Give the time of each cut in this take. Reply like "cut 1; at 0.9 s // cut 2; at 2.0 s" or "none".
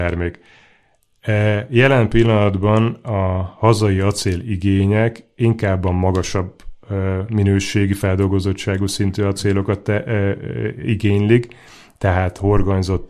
none